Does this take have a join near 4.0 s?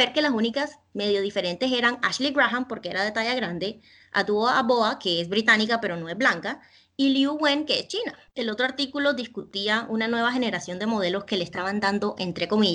no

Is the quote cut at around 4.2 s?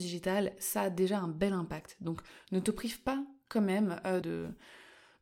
yes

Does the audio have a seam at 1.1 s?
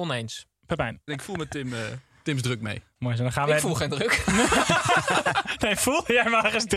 yes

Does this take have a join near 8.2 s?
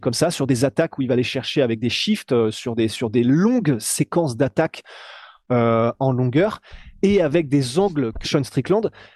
yes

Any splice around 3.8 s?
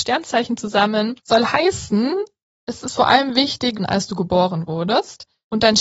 yes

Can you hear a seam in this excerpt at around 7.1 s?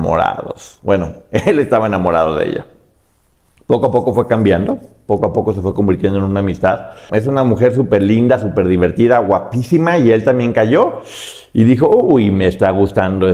yes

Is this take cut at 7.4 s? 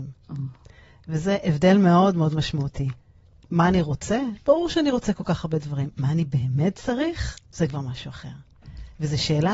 yes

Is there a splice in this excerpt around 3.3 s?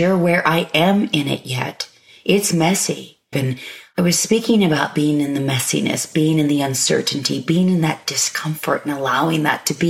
yes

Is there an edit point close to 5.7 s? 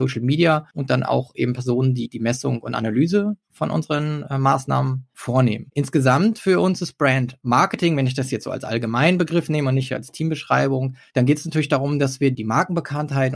no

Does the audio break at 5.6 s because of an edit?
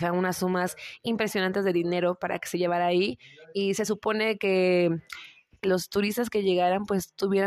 yes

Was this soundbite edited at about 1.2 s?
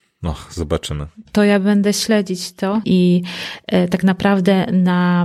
no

